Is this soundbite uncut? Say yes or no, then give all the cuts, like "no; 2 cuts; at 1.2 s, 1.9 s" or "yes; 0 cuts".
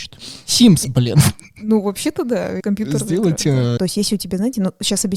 no; 2 cuts; at 2.6 s, 3.8 s